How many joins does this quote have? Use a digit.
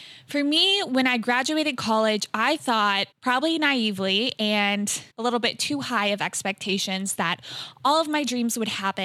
2